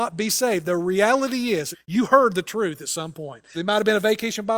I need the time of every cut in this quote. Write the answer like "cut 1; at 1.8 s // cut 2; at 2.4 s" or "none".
cut 1; at 1.7 s // cut 2; at 3.5 s